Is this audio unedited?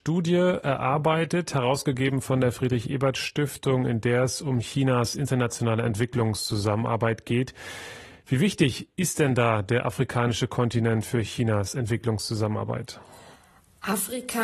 yes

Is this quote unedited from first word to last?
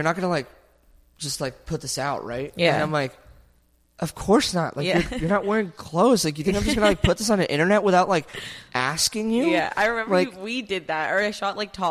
yes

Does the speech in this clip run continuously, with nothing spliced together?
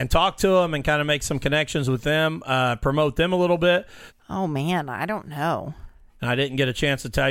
no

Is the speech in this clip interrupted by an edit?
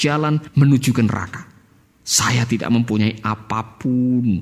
yes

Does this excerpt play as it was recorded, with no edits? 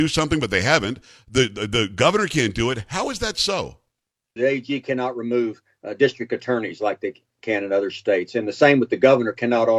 no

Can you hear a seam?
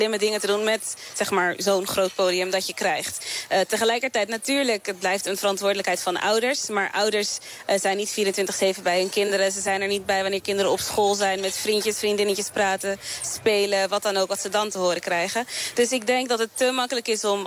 no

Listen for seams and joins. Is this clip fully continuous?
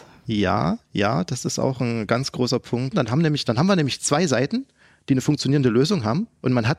no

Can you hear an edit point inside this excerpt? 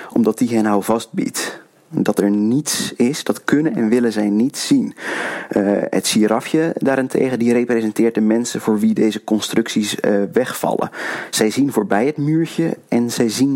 no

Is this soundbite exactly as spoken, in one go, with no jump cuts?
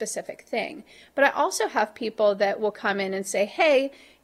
yes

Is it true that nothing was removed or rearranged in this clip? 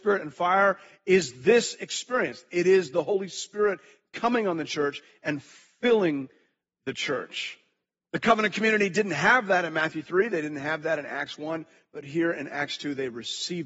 yes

